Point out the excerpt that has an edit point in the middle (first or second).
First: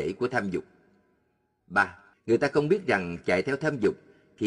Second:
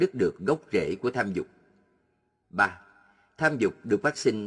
first